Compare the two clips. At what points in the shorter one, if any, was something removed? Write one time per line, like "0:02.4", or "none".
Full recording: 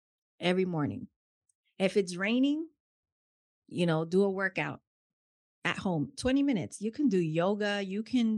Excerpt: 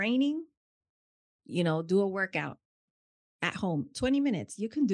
none